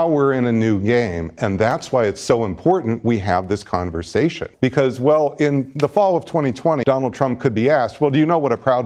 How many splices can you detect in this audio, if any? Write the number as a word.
two